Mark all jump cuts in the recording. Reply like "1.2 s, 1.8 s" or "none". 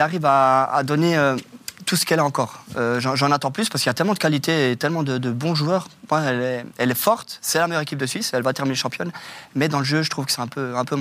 none